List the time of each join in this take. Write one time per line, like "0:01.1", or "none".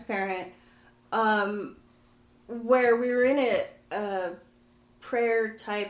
none